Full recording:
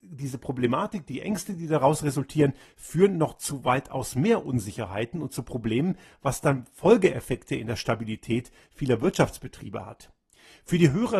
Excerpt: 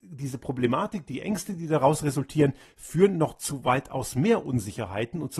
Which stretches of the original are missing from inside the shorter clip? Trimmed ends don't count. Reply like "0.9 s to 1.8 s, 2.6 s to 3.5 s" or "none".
none